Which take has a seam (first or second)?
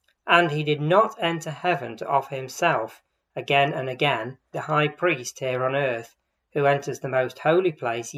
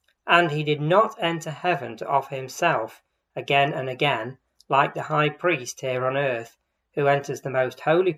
first